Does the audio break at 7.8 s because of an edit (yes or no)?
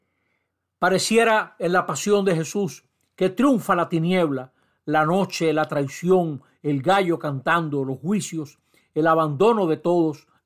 no